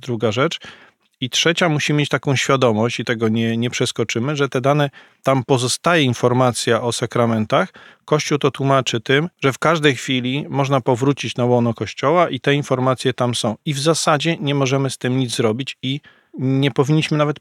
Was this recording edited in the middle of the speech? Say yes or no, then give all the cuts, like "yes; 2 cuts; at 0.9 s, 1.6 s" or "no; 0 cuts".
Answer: yes; 1 cut; at 9.3 s